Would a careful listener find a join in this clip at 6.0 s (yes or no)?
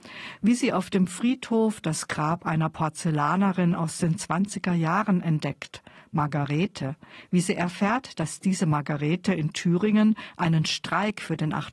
no